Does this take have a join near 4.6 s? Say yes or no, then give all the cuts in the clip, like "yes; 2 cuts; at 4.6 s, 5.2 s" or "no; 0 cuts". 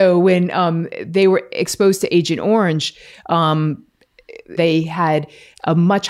yes; 1 cut; at 4.6 s